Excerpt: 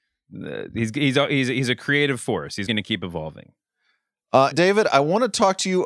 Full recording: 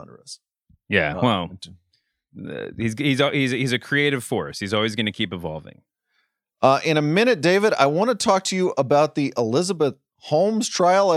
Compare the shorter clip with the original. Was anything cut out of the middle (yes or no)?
yes